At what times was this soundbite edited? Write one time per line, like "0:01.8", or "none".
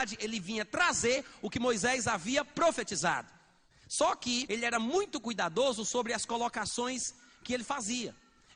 0:04.5